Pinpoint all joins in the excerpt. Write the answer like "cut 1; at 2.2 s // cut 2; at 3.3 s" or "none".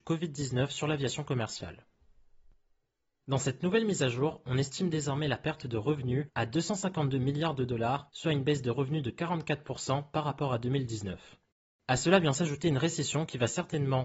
none

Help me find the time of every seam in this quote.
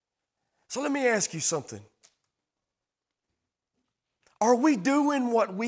none

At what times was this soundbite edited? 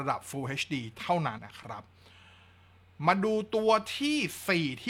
cut 1; at 1.4 s

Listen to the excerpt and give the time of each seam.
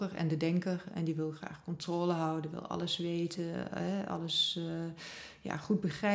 none

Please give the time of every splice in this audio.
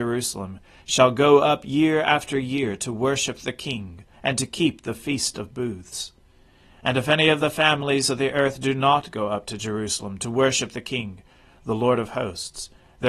cut 1; at 4.1 s

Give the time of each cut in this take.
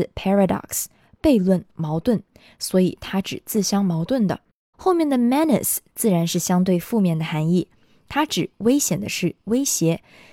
cut 1; at 4.7 s

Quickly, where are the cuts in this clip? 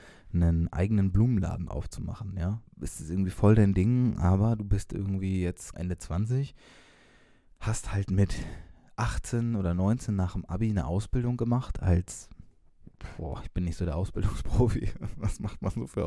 cut 1; at 2.7 s // cut 2; at 5.7 s

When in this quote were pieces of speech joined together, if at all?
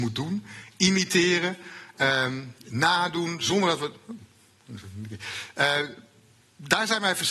none

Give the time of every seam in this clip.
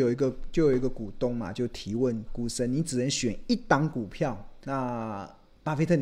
cut 1; at 2.3 s // cut 2; at 4.6 s

